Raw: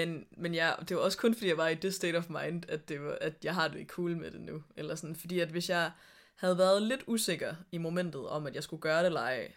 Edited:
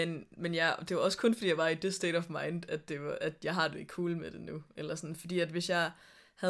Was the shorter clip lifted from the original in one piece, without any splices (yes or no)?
yes